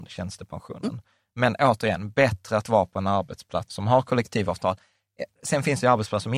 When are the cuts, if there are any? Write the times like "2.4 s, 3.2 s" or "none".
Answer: 3.7 s